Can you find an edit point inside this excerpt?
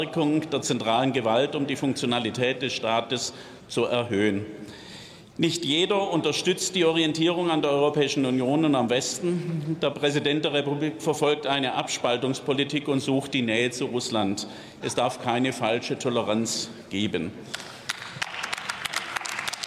yes; 2 cuts; at 11.0 s, 14.8 s

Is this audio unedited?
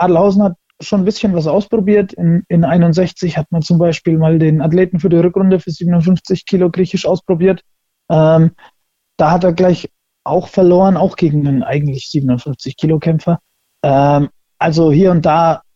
yes; 0 cuts

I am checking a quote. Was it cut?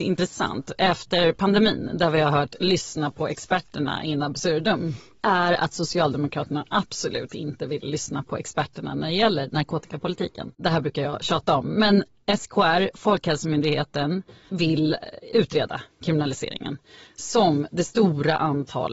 no; 0 cuts

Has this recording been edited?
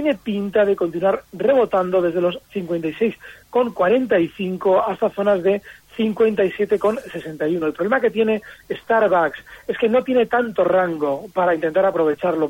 no; 0 cuts

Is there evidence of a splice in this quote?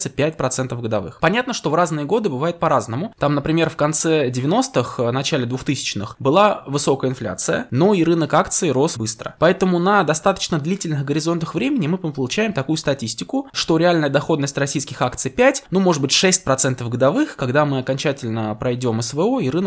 yes; 1 cut; at 9.0 s

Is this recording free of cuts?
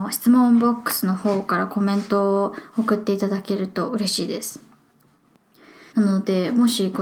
no; 1 cut; at 5.9 s

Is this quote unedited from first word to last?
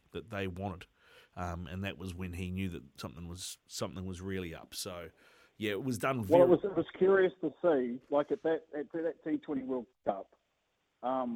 yes; 0 cuts

